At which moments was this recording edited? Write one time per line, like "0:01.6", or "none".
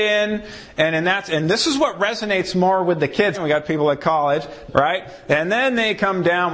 0:03.3
0:04.7